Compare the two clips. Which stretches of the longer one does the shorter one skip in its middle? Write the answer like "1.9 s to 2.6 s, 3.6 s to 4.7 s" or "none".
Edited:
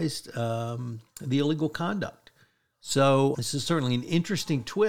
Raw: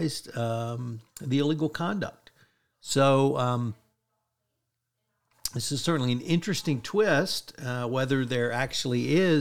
3.3 s to 5.5 s